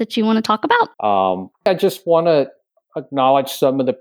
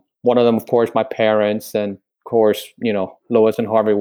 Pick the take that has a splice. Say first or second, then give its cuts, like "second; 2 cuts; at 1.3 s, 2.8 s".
first; 1 cut; at 0.9 s